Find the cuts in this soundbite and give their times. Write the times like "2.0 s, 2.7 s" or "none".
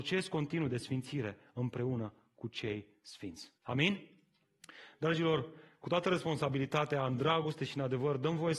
3.6 s